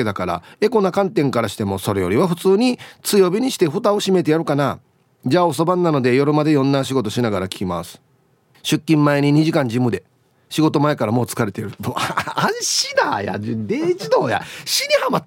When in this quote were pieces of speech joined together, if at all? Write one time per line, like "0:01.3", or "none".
0:08.5